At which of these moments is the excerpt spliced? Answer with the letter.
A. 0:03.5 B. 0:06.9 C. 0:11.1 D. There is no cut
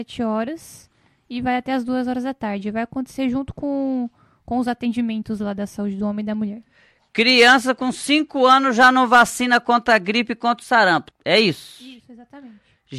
C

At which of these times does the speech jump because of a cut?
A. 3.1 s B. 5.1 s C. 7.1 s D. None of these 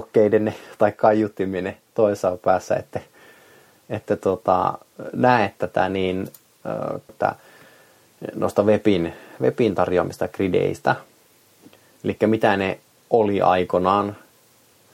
C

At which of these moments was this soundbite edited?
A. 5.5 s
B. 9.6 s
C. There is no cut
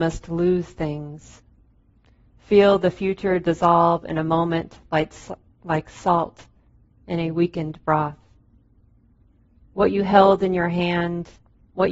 C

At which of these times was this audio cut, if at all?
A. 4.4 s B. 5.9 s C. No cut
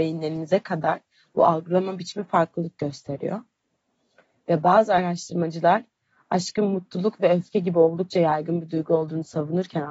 C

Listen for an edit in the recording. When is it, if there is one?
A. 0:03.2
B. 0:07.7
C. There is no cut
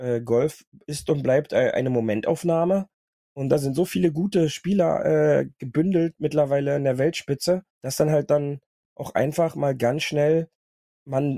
B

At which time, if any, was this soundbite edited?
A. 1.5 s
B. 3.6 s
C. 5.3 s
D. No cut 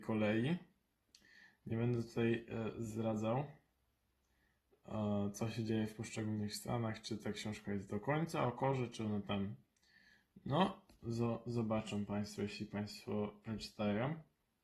D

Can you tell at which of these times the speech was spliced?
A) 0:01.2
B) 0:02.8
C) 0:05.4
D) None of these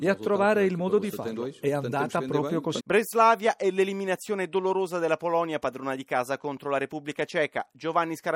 B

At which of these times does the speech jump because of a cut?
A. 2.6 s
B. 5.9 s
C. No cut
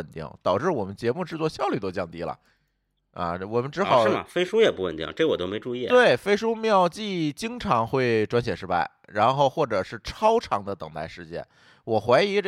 C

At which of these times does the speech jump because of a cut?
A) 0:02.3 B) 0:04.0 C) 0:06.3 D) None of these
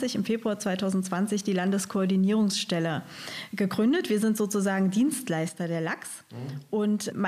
D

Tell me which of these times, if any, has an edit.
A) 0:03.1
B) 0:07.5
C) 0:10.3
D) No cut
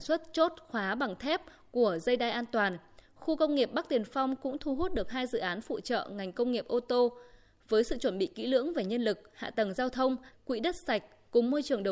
C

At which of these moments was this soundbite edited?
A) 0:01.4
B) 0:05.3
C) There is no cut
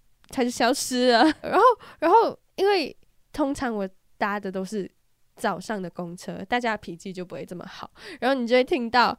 A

